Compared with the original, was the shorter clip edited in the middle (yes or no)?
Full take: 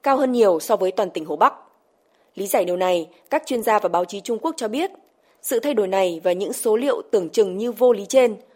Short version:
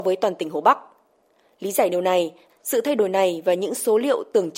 yes